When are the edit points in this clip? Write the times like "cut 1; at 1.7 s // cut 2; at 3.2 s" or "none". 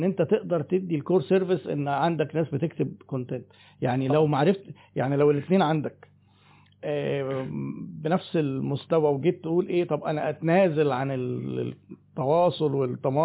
none